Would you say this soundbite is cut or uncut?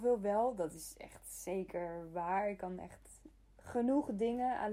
uncut